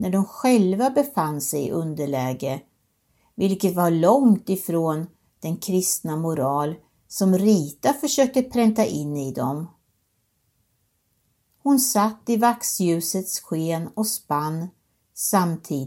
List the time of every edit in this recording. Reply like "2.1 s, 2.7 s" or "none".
11.5 s